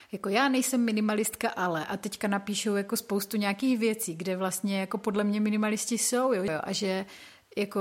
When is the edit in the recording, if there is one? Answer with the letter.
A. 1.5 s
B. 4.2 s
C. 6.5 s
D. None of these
C